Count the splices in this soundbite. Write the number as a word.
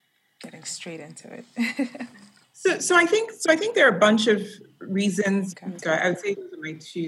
one